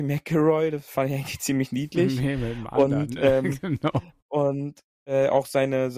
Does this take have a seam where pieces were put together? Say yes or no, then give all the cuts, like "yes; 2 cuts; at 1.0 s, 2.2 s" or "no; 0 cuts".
no; 0 cuts